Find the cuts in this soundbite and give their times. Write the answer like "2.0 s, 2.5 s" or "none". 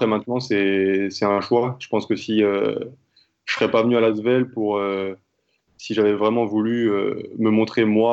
none